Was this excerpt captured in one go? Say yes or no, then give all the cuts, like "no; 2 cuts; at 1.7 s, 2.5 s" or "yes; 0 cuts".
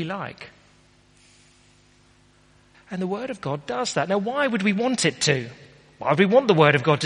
no; 1 cut; at 2.7 s